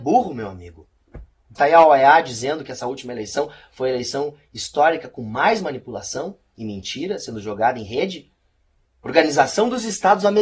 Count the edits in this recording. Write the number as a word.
two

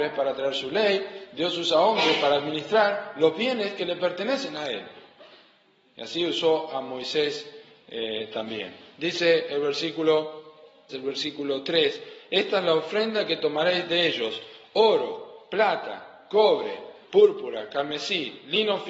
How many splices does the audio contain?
two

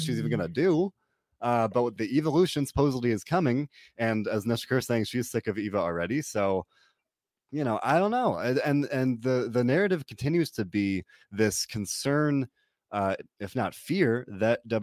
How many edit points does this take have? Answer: one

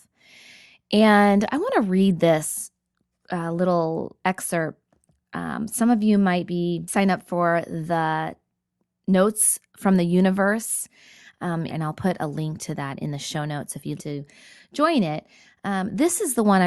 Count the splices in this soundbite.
two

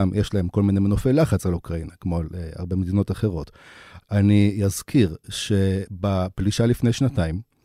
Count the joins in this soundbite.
one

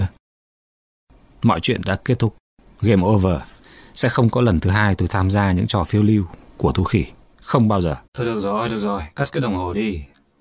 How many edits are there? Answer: one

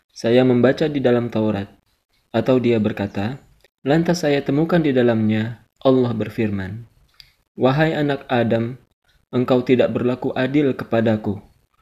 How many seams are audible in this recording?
one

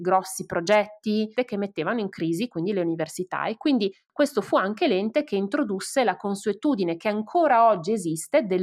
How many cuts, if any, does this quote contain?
one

